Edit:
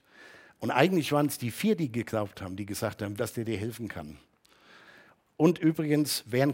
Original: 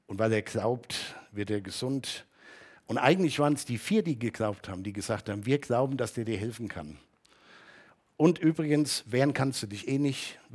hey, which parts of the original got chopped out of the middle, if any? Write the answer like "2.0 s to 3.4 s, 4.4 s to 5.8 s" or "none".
5.4 s to 6.0 s